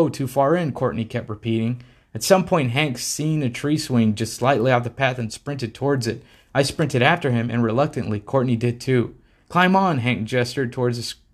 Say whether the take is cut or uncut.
uncut